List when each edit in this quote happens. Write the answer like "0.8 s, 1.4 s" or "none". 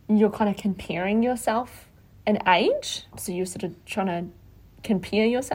3.1 s

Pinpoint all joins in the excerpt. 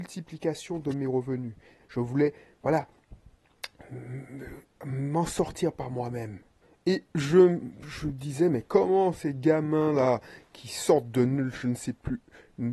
1.8 s

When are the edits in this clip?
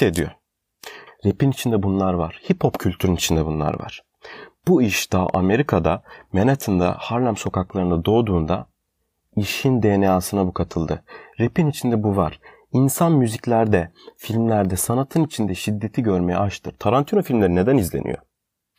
1.1 s

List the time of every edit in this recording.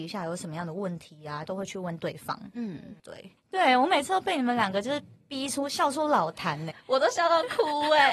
1.5 s, 3.4 s, 6.7 s

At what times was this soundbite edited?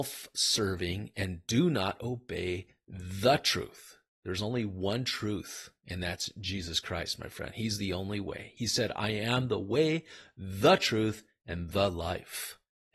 none

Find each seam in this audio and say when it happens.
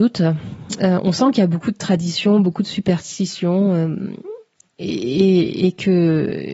none

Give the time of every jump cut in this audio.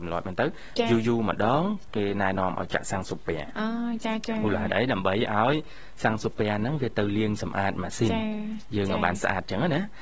none

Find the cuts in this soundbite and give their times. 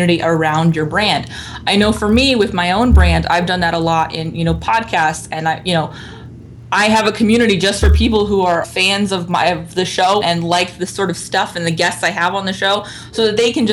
8.6 s, 10.2 s

